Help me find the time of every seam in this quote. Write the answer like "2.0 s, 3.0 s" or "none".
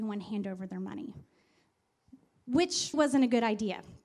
2.9 s